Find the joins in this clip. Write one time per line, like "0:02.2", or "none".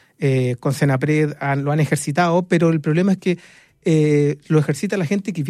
none

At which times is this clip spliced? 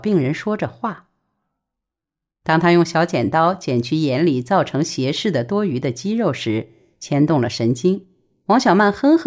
none

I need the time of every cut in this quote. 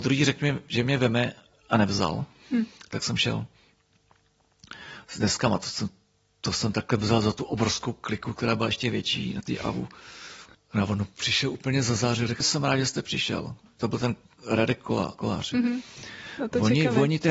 0:10.5
0:12.4

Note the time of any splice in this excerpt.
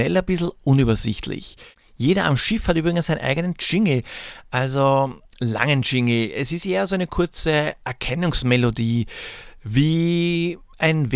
none

